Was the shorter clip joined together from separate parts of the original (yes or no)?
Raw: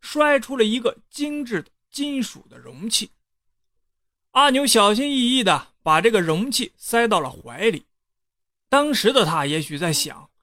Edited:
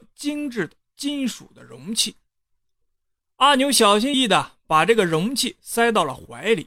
yes